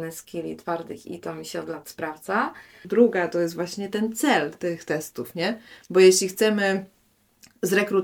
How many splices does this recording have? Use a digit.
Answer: 2